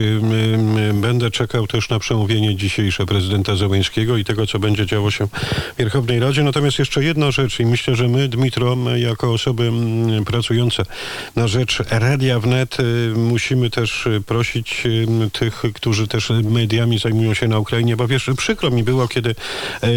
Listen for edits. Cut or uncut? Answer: uncut